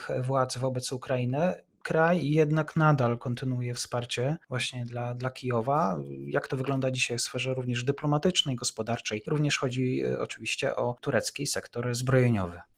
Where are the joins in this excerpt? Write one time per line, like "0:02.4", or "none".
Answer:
none